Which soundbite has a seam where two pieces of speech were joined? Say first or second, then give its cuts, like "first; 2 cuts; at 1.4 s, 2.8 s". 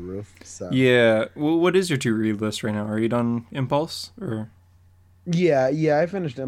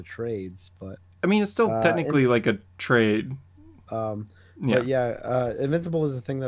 second; 1 cut; at 3.8 s